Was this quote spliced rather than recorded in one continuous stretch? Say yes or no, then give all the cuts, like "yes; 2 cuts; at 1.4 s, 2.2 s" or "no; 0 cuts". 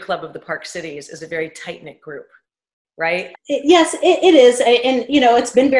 yes; 1 cut; at 3.3 s